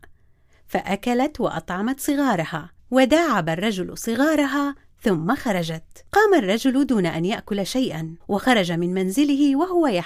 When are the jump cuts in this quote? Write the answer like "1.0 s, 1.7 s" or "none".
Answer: 2.8 s, 6.1 s, 8.2 s

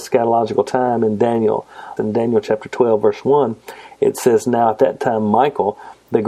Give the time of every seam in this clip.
2.0 s

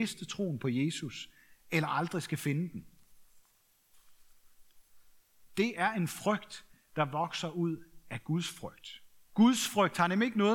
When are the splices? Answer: 9.3 s

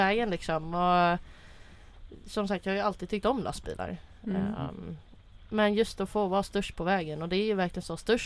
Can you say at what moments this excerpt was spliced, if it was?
none

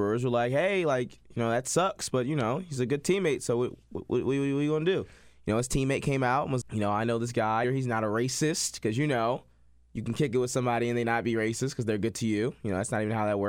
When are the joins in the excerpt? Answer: 6.6 s, 7.6 s

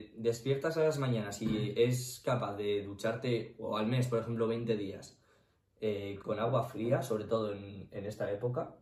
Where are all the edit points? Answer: 6.2 s

